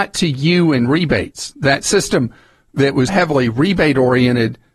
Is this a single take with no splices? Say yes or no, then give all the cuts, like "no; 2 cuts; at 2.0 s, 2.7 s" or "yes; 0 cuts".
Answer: no; 1 cut; at 3.1 s